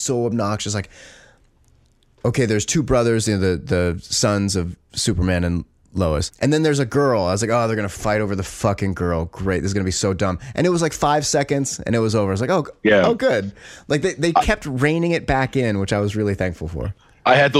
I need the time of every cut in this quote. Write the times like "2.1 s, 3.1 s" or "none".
6.3 s

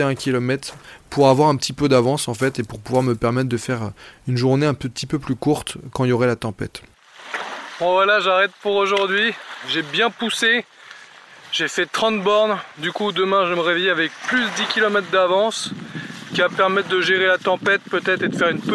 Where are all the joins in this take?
none

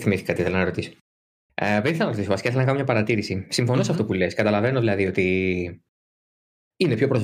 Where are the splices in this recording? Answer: none

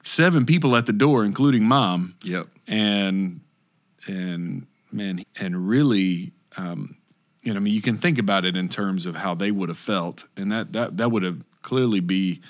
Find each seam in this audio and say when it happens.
5.2 s

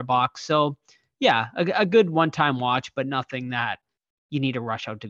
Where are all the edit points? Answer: none

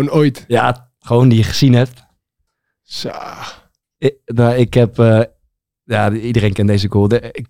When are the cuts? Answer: none

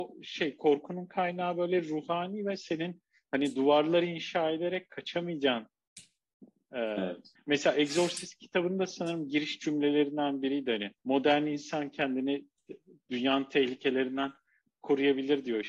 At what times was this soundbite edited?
7.4 s, 11.0 s

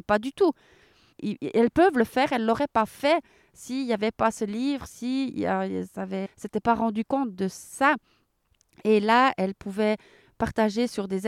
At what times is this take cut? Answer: 1.1 s, 6.3 s

